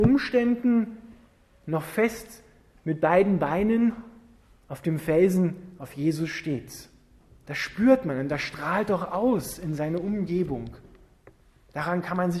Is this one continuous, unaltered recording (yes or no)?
yes